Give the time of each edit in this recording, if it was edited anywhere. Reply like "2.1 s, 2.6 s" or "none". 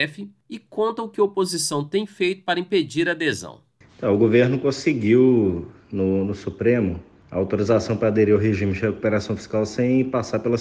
none